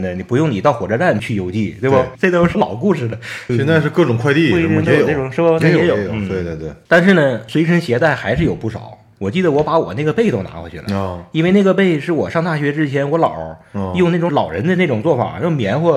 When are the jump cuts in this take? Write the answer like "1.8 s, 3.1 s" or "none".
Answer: 3.5 s